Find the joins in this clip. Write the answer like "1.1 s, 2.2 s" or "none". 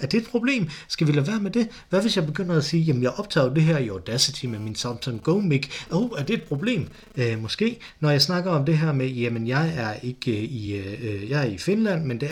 none